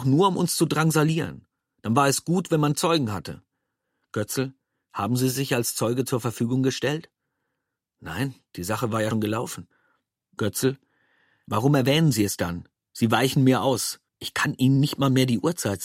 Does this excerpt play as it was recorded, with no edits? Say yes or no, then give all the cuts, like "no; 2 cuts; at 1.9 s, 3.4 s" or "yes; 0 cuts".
no; 2 cuts; at 9.1 s, 14.1 s